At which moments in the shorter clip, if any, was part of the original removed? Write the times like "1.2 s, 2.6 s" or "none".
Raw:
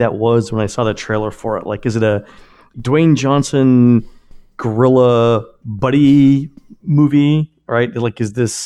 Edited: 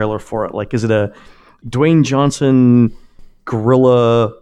none